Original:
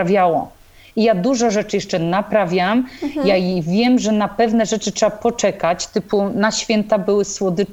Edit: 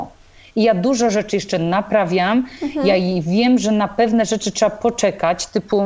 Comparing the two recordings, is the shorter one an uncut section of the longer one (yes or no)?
yes